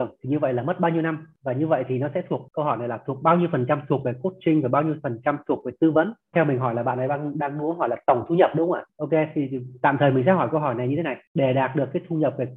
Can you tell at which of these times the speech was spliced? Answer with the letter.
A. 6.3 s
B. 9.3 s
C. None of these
A